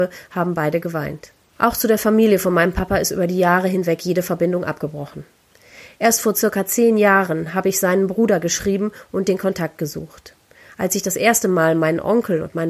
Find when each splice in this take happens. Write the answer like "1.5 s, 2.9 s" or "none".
1.6 s